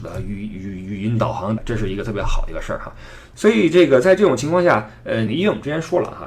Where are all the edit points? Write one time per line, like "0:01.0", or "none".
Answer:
0:01.6
0:05.3